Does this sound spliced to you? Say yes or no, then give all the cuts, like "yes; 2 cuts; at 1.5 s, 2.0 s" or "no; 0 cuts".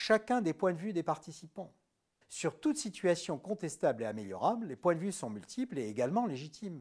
yes; 1 cut; at 2.2 s